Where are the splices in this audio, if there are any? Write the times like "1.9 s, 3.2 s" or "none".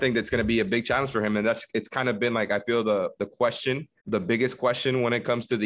4.0 s